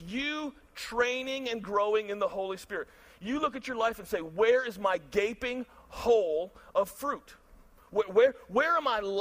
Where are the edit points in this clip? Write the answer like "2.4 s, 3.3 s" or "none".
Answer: none